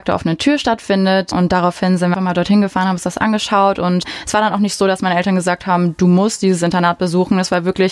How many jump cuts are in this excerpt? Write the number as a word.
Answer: one